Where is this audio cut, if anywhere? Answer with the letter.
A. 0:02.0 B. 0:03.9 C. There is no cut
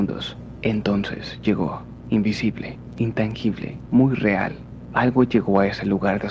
B